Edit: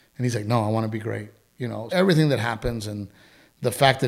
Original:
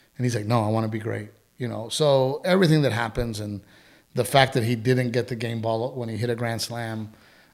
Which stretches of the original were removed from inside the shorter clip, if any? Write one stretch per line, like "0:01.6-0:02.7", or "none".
0:01.9-0:02.4